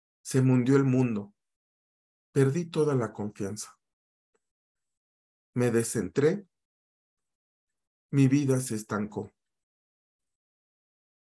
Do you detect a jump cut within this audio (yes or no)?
no